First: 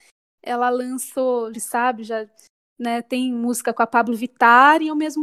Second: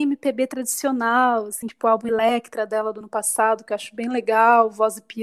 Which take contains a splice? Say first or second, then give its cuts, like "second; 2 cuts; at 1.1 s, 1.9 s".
first; 1 cut; at 1.5 s